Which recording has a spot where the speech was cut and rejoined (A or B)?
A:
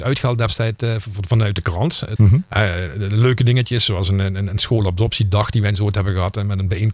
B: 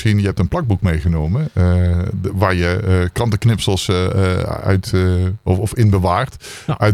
A